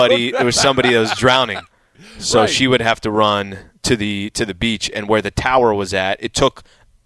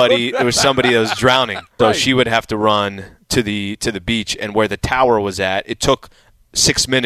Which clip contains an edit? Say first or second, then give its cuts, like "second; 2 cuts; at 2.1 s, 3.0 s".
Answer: second; 1 cut; at 1.8 s